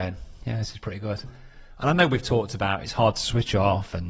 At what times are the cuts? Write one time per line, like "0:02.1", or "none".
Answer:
0:01.2